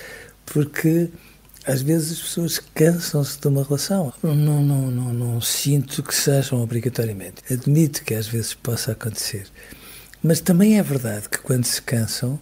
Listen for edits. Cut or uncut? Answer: cut